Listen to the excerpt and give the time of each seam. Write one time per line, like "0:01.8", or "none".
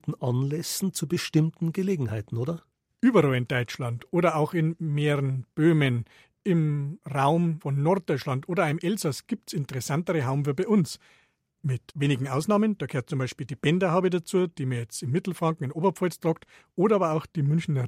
0:02.9